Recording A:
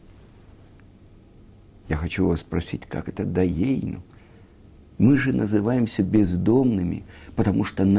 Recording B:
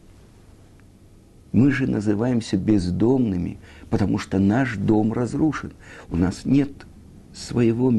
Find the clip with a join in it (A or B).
B